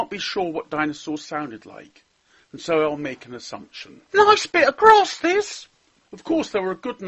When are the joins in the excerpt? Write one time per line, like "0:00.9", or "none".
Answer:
0:04.1
0:06.0